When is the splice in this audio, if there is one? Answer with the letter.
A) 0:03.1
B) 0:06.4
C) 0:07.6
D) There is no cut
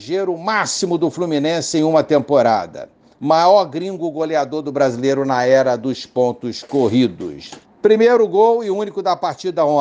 C